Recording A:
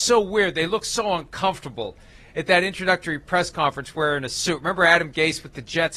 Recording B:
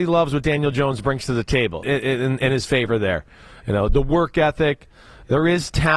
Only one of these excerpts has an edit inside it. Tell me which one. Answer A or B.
B